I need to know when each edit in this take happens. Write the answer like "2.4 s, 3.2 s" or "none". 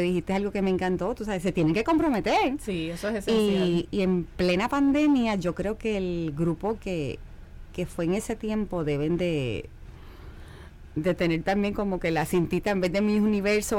3.9 s